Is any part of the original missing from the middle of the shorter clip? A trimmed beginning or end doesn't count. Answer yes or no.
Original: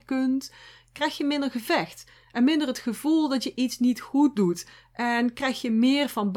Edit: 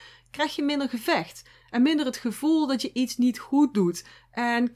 no